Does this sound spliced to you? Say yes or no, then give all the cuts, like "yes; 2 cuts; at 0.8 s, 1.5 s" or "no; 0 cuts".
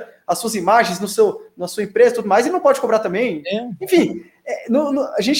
no; 0 cuts